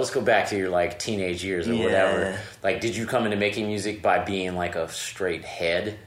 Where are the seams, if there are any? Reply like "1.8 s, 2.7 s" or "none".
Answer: none